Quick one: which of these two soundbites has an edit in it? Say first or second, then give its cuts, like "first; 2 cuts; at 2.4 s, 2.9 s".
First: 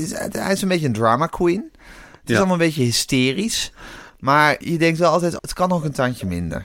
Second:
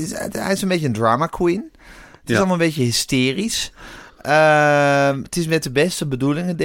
first; 2 cuts; at 4.1 s, 5.4 s